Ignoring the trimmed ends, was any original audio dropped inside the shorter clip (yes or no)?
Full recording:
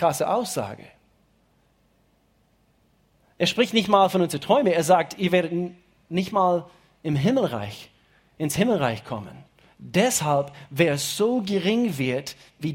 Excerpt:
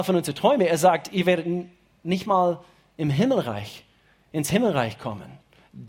no